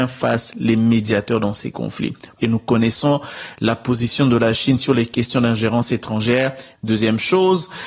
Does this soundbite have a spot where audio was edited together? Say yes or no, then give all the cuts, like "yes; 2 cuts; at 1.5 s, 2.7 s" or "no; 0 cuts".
yes; 2 cuts; at 2.4 s, 6.7 s